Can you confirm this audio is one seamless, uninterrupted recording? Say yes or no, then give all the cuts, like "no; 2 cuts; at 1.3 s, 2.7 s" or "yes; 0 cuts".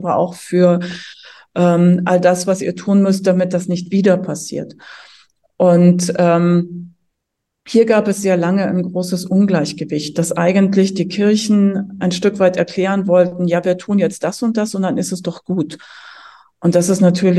yes; 0 cuts